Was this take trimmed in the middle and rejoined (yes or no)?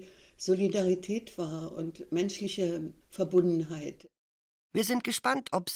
yes